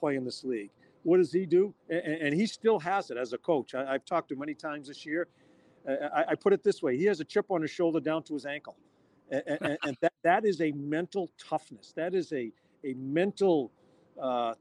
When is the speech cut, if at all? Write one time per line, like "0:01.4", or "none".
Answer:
none